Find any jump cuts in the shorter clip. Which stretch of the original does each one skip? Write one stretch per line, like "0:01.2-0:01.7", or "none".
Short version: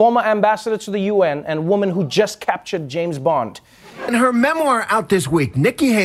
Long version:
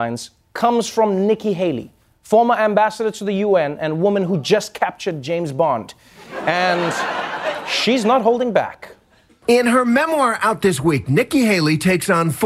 0:06.4-0:09.6